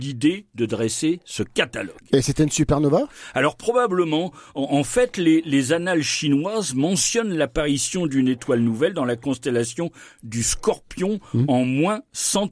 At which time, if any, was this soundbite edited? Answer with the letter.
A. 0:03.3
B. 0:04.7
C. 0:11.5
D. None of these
D